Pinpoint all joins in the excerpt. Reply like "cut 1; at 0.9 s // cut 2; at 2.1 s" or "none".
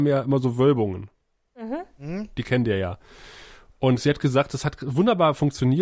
none